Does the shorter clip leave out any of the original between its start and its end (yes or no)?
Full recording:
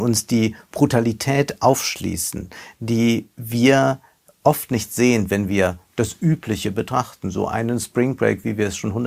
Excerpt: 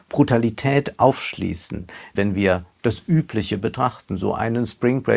yes